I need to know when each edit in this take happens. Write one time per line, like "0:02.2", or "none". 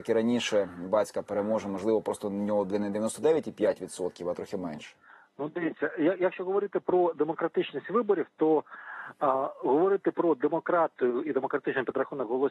none